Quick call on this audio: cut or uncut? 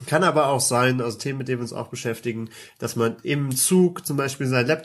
uncut